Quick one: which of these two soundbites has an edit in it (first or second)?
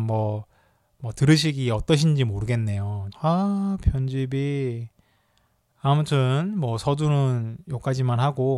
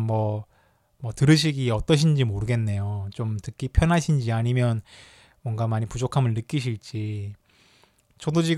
first